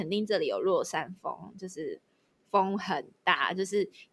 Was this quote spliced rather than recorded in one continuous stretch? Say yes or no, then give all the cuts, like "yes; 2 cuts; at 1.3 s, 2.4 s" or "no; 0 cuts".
no; 0 cuts